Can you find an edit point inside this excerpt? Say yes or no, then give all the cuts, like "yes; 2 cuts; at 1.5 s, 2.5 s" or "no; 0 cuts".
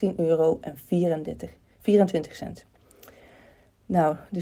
no; 0 cuts